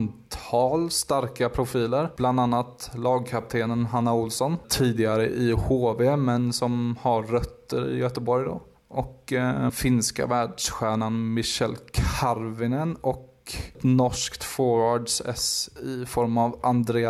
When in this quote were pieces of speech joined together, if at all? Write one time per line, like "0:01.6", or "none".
0:09.7